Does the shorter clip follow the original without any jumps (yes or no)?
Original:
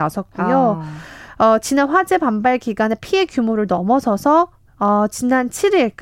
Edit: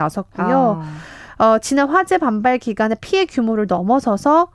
yes